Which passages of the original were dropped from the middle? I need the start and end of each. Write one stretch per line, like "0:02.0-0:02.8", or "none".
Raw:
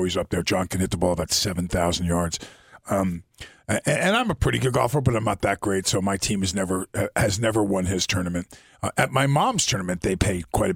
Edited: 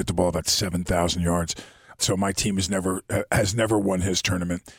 0:02.8-0:05.8

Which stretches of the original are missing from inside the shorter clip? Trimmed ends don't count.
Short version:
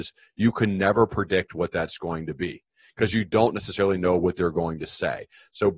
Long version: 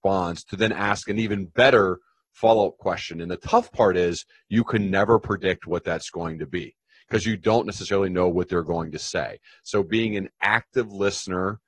none

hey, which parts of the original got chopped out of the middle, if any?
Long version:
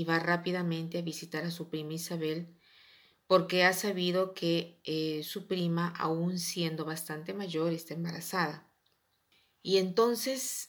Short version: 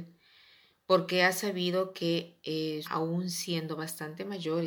0:05.2-0:05.9

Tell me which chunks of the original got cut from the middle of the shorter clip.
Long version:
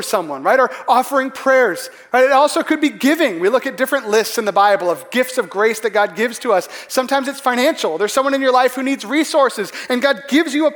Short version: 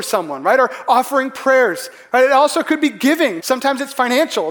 0:03.4-0:06.9

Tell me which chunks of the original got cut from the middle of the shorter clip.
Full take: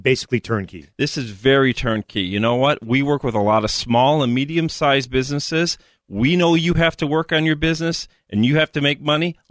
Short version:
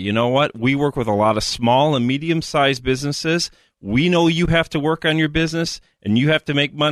none

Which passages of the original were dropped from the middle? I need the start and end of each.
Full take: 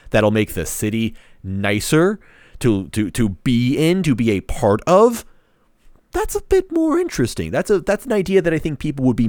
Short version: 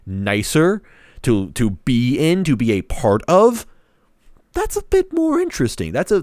0:02.9-0:03.1

